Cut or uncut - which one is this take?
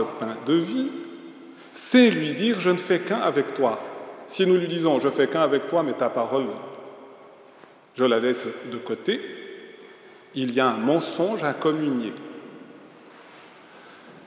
uncut